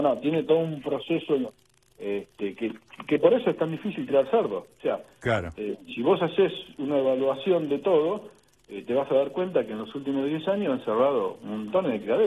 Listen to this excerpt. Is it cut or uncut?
uncut